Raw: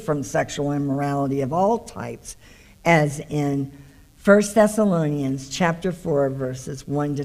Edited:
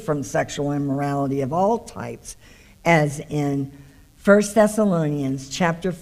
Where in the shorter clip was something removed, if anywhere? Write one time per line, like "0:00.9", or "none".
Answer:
none